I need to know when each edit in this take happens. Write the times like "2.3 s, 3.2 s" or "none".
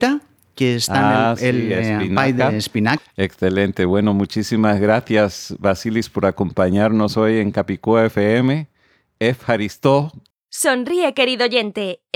3.0 s, 10.3 s